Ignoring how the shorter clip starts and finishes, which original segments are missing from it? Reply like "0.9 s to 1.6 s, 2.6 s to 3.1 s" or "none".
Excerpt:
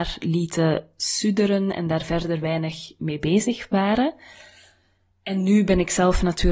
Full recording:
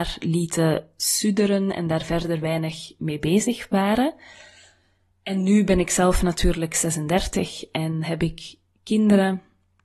none